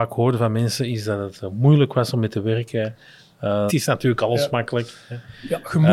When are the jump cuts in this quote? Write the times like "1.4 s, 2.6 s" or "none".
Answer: 3.7 s